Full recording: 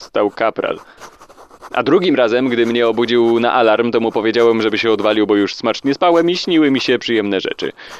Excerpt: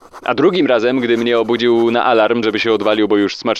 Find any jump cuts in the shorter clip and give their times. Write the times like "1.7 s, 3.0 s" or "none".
2.4 s

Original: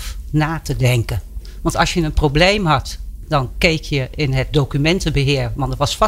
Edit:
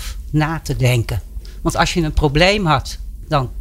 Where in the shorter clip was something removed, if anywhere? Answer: none

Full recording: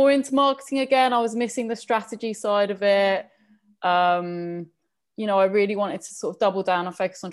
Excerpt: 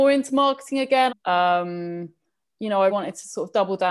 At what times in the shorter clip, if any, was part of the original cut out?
1.1 s, 2.9 s

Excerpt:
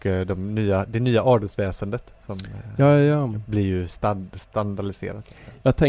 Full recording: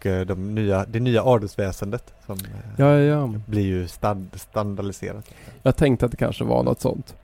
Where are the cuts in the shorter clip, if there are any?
none

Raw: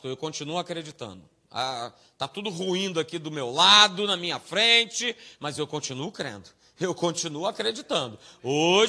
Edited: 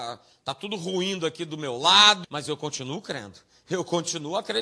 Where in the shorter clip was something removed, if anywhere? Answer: 2.2 s

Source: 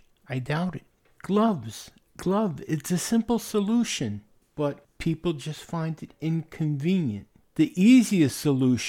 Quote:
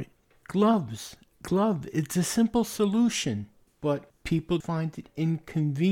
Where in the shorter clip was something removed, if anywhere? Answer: 4.6 s

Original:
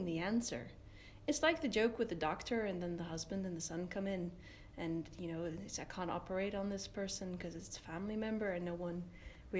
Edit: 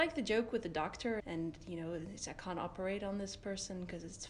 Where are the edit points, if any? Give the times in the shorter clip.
1.2 s

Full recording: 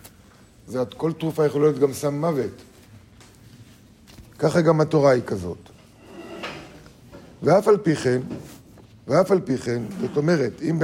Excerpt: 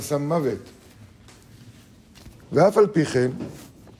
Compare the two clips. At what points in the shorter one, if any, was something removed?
2.4 s

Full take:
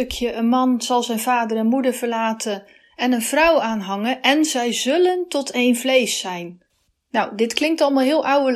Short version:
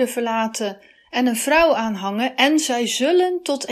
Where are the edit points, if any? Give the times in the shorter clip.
none

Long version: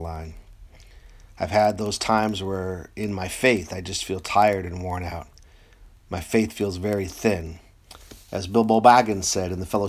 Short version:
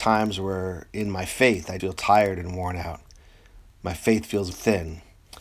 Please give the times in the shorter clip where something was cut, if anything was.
1.8 s, 4.5 s

